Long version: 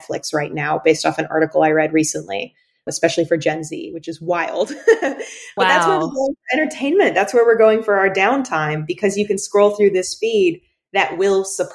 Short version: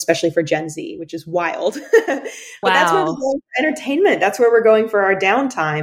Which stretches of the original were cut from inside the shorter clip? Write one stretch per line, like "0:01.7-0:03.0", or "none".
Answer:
none

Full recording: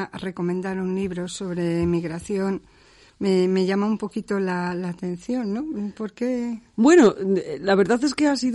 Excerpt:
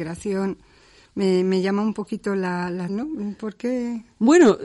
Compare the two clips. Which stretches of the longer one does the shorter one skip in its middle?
0:04.9-0:05.4

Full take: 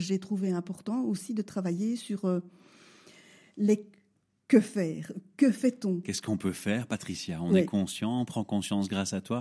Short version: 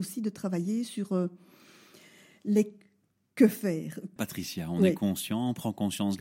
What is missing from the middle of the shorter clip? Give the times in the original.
0:05.3-0:06.9

